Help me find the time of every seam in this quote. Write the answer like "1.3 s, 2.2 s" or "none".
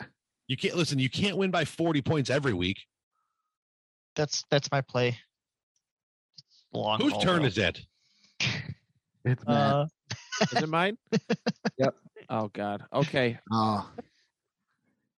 4.0 s, 13.4 s